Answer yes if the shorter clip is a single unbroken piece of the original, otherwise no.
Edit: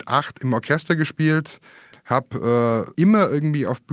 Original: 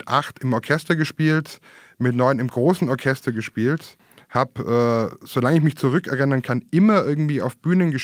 no